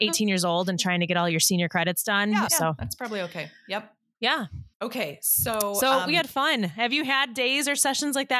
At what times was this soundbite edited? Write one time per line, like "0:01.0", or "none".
0:02.5
0:04.7